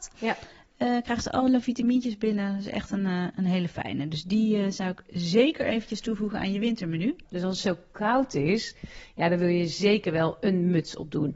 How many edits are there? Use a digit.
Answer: 1